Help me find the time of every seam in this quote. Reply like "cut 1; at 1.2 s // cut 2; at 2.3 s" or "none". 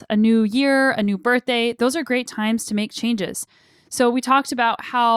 none